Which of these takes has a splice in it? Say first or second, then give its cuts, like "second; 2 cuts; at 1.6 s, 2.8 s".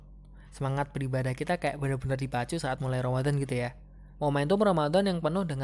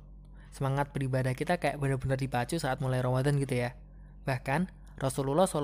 first; 1 cut; at 4.2 s